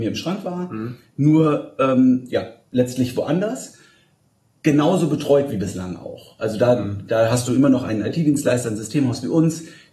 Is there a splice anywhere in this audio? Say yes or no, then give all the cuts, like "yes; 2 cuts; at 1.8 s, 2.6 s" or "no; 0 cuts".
no; 0 cuts